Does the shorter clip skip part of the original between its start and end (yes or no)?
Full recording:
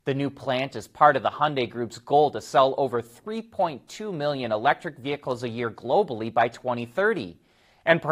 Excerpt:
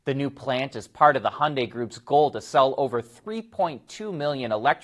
no